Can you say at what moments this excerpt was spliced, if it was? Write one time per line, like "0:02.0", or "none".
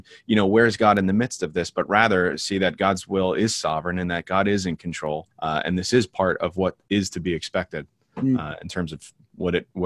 0:05.3